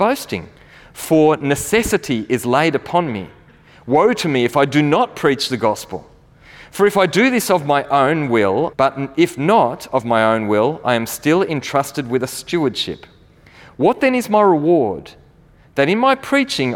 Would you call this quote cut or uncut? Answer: cut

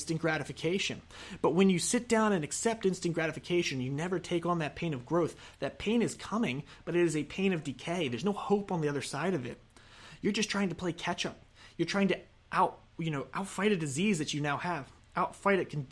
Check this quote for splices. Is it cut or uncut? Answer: uncut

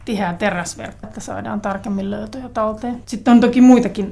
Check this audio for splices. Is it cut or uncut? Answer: cut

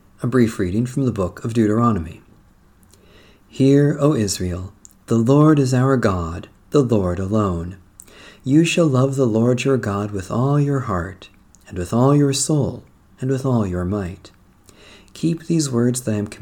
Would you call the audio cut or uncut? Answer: uncut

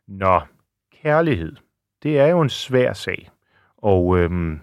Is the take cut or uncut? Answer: uncut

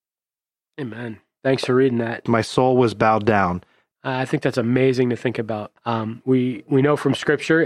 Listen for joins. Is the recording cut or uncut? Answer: cut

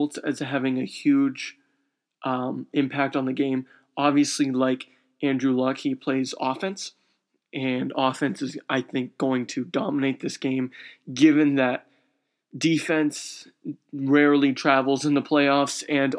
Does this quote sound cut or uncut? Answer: uncut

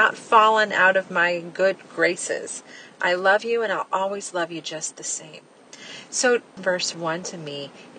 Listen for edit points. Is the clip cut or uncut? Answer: cut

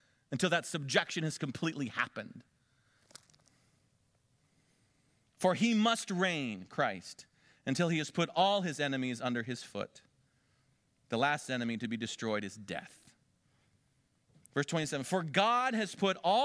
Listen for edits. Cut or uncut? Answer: uncut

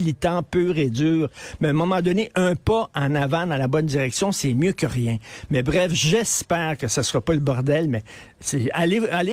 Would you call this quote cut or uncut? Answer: uncut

